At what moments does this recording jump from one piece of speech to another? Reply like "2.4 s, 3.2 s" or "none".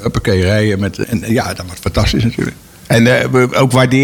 1.0 s